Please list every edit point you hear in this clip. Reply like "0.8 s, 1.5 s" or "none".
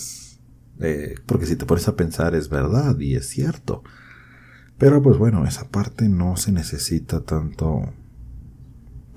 1.3 s